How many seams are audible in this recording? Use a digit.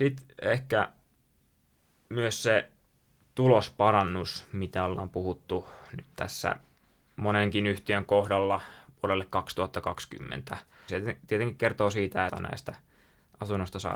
2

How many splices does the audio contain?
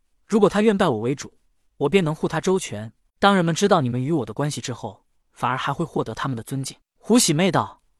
1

